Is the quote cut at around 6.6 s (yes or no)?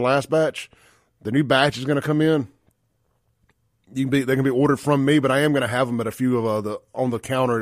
no